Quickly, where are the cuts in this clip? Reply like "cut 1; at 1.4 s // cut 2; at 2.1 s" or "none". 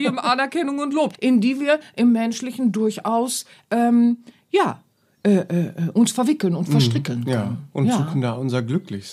cut 1; at 1.1 s